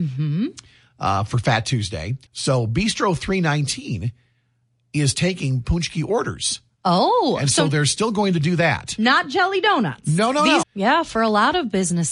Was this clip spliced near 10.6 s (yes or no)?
yes